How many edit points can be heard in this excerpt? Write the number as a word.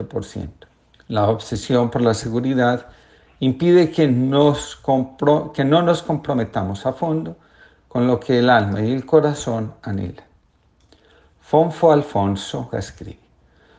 two